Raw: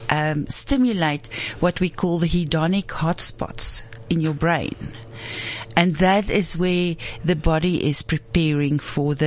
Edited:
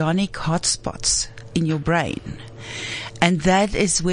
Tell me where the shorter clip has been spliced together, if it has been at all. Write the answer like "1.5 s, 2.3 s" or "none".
none